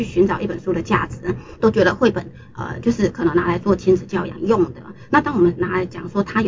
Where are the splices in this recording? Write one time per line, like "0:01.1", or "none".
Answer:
0:01.6